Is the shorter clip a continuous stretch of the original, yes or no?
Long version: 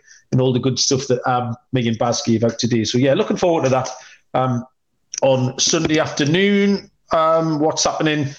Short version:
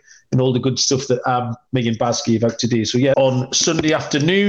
no